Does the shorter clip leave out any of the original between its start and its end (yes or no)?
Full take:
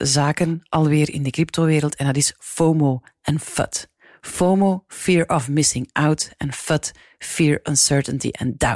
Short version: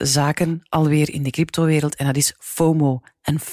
no